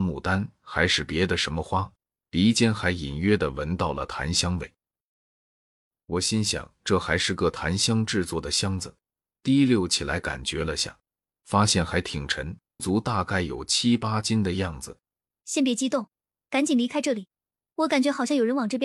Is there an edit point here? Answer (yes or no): yes